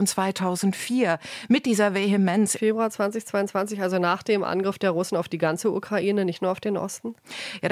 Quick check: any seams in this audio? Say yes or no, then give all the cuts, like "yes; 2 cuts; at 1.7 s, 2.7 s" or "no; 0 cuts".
yes; 1 cut; at 2.5 s